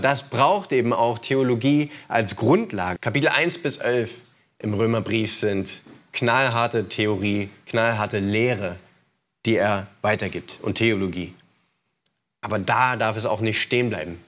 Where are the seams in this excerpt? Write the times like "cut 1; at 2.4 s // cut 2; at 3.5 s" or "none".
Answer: cut 1; at 3.0 s